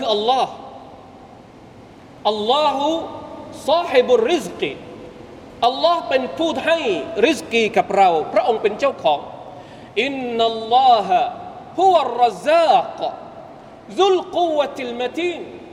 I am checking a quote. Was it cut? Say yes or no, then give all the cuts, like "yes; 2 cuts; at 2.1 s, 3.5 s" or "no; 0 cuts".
no; 0 cuts